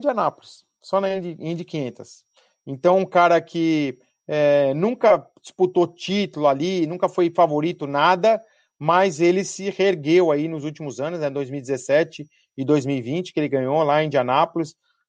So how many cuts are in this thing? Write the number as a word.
zero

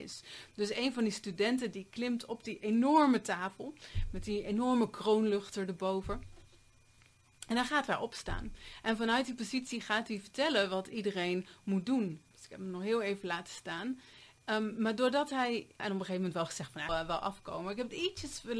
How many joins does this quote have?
three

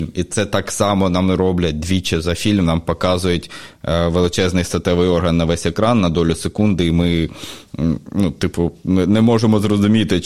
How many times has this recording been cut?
zero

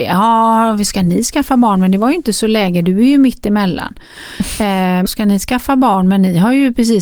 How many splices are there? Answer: one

